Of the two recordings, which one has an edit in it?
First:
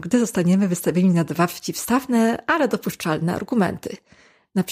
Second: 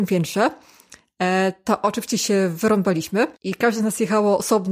second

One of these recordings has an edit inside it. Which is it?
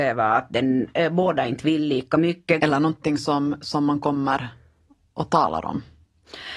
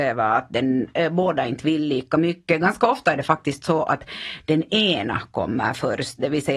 first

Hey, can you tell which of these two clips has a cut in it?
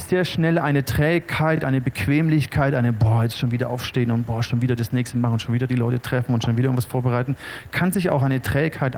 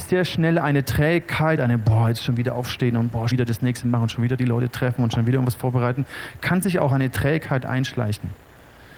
second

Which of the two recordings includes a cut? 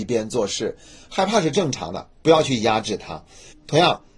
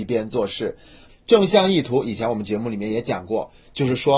second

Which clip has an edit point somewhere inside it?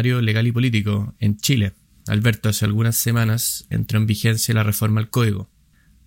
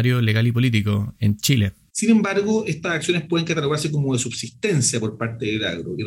second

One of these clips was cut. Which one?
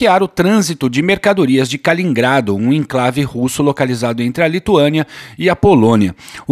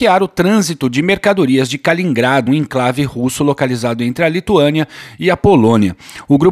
second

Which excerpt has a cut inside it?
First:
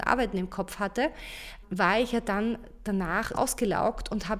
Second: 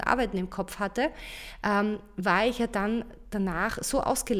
first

